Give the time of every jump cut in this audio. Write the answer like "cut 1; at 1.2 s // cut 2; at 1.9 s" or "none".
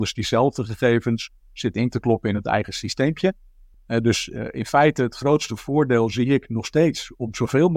cut 1; at 3.7 s